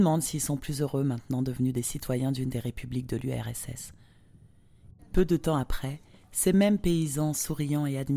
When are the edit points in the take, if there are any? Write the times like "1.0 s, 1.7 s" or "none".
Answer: 5.0 s